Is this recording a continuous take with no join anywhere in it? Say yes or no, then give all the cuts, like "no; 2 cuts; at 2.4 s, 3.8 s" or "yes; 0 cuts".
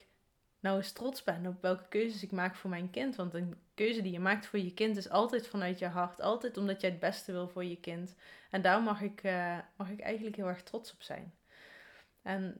yes; 0 cuts